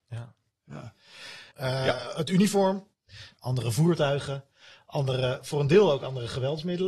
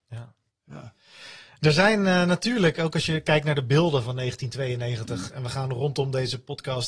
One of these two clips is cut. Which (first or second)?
first